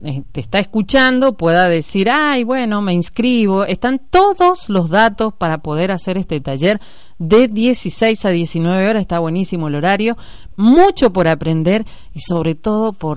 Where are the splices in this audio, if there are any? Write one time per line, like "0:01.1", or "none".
0:10.5